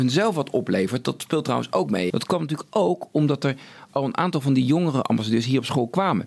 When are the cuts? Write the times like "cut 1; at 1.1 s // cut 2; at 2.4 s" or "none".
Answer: cut 1; at 2.1 s